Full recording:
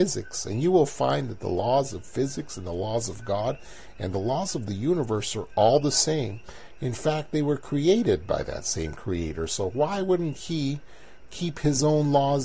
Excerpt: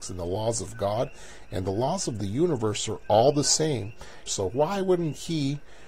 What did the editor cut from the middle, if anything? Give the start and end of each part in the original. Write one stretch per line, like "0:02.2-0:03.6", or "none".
0:06.7-0:09.5